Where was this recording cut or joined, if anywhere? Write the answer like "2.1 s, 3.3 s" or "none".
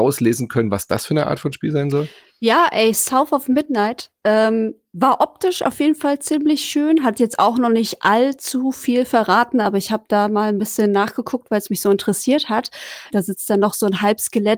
13.1 s